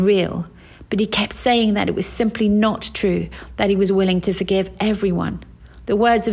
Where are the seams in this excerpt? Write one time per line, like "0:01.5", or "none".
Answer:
none

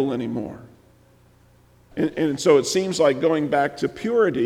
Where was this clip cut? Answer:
0:01.9

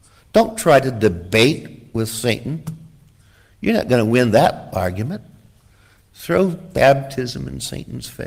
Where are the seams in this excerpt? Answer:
0:06.1

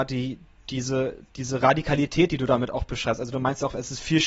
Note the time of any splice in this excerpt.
none

